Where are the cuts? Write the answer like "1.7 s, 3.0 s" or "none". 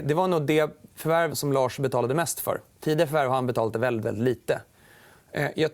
1.3 s, 2.8 s